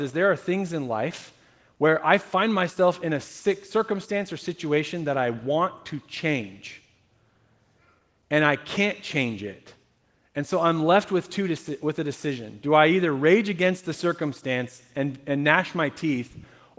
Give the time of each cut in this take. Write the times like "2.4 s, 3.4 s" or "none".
none